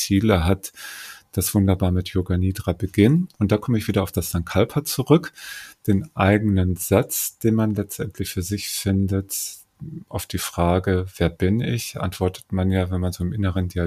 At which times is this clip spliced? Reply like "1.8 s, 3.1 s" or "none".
none